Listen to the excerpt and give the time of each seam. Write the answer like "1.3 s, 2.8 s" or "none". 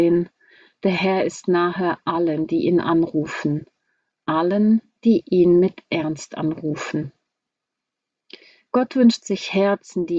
none